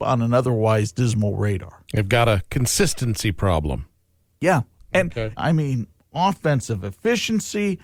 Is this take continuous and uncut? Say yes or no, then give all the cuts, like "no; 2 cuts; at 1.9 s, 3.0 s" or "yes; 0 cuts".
no; 1 cut; at 5.4 s